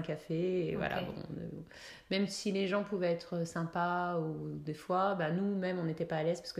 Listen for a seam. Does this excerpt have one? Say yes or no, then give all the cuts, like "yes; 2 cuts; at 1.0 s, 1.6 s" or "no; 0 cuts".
no; 0 cuts